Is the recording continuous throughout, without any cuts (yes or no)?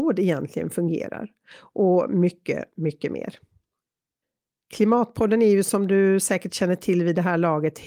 yes